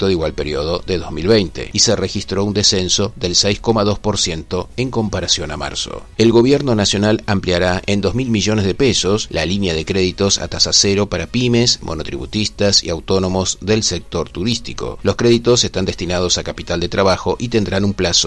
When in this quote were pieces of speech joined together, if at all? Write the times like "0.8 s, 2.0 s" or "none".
6.1 s

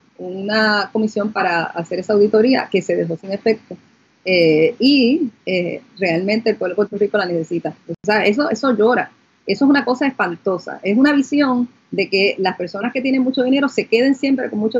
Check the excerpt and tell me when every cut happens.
7.8 s

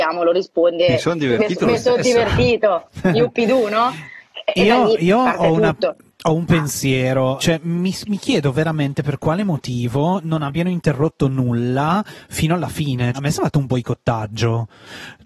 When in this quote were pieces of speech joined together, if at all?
7.4 s, 13.1 s

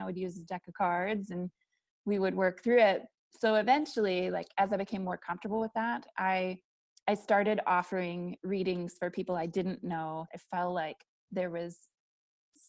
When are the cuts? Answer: 10.3 s

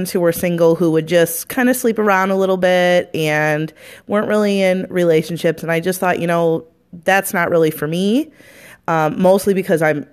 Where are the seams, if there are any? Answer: none

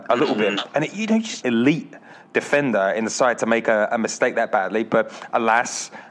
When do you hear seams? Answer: 1.4 s

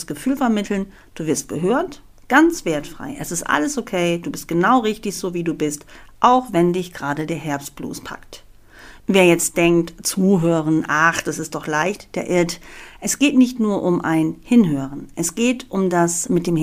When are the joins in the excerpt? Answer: none

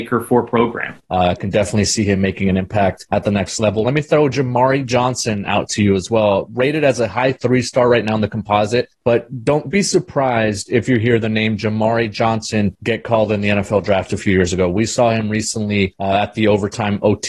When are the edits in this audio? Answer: 1.0 s, 3.8 s

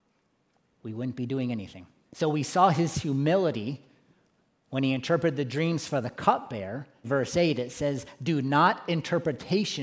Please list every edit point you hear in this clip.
2.0 s, 7.0 s

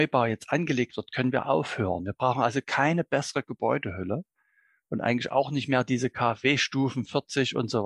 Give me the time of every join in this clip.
none

